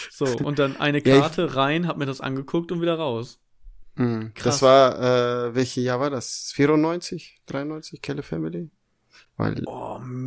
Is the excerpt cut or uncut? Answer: uncut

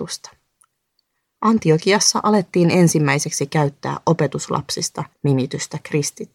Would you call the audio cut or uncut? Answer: uncut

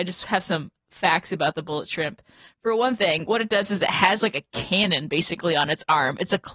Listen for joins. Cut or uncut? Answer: uncut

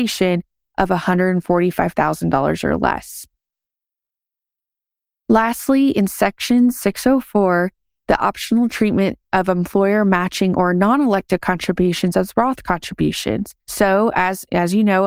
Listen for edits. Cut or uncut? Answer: cut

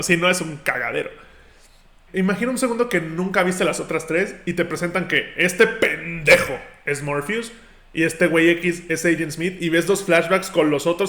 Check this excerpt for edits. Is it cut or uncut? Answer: cut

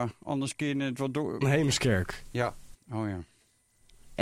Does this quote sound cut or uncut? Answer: cut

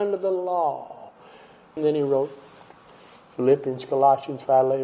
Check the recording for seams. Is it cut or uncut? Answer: cut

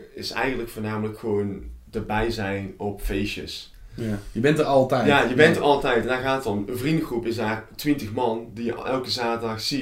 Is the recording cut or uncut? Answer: uncut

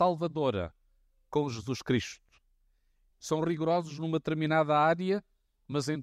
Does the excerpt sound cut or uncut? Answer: cut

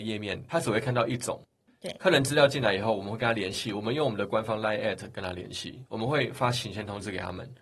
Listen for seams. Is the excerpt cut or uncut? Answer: uncut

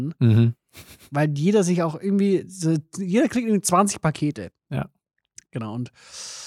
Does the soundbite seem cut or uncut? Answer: uncut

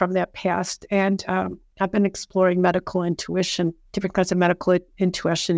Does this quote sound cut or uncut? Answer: cut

